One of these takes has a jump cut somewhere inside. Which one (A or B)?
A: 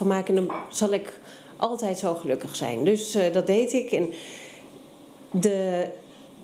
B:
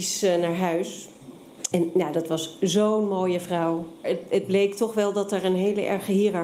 B